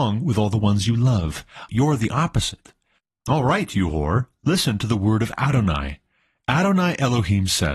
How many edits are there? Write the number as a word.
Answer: one